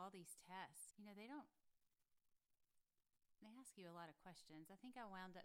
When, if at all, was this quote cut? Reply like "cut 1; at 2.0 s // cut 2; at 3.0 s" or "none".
cut 1; at 0.9 s